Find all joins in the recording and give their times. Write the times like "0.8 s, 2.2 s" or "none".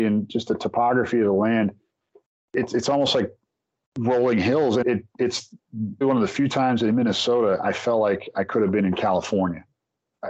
4.8 s, 6.0 s